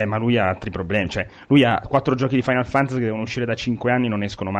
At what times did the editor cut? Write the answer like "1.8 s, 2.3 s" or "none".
none